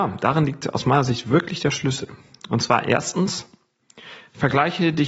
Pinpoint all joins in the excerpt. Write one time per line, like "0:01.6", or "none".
none